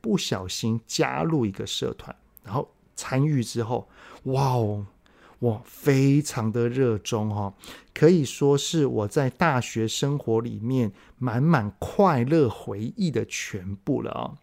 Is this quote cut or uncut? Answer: uncut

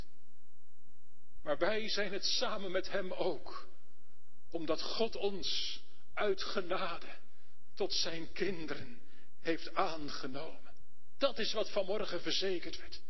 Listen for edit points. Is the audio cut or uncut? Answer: cut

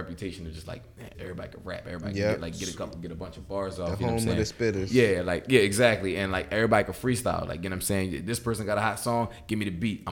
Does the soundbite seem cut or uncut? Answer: cut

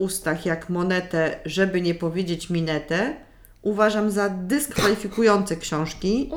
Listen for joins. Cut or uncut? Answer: uncut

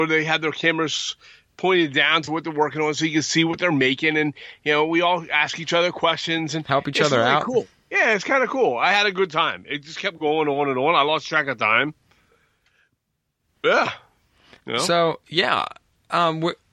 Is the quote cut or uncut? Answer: uncut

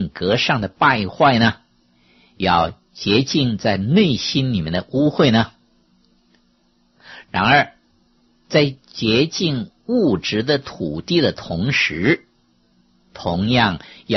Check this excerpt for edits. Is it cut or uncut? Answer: cut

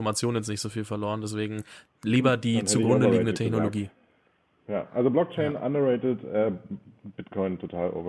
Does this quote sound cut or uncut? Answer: uncut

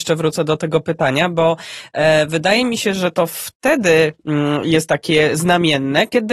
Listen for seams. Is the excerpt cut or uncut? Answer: uncut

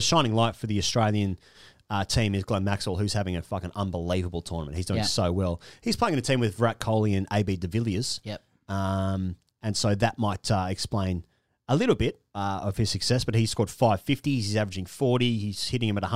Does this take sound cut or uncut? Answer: uncut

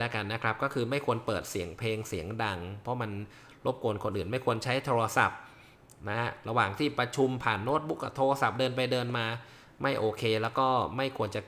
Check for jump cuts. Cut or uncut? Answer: uncut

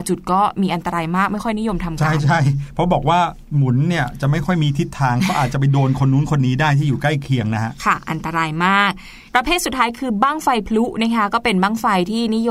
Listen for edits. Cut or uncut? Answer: cut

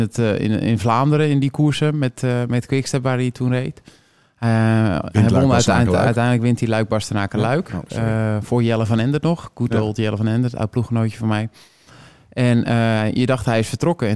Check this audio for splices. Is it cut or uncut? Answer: uncut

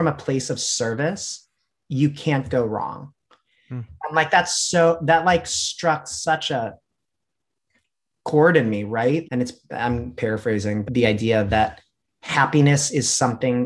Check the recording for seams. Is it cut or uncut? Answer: cut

